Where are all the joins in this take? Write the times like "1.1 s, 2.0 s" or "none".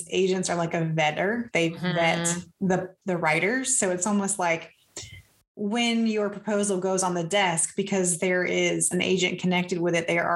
1.5 s, 3.0 s